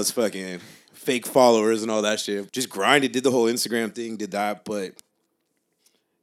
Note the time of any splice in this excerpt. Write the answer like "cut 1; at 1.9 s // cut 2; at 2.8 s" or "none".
cut 1; at 2.5 s